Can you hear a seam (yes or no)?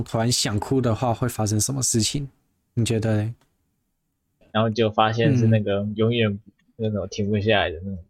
yes